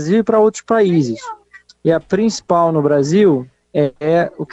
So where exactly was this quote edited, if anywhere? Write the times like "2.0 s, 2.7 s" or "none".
1.7 s